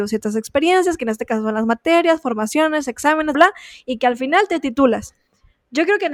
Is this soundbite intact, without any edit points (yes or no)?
no